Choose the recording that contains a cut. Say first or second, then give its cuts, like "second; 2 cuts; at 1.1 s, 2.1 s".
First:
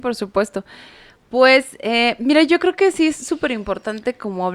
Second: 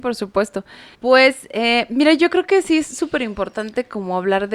second; 1 cut; at 0.9 s